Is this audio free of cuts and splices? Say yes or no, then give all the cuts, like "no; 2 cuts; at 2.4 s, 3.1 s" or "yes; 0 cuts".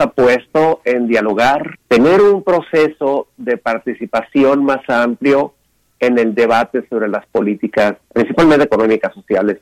no; 2 cuts; at 1.7 s, 8.0 s